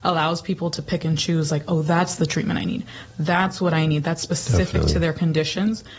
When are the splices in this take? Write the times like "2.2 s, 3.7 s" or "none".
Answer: none